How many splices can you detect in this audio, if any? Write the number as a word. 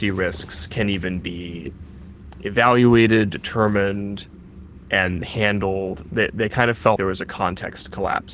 one